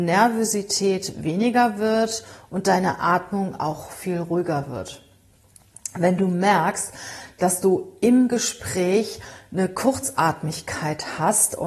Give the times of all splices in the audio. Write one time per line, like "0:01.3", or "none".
none